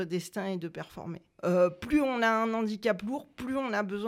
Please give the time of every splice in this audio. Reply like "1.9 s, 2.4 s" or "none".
1.4 s